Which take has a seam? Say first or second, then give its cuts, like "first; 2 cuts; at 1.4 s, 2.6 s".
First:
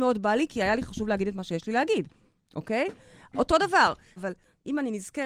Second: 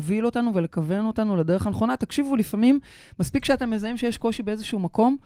first; 1 cut; at 4.2 s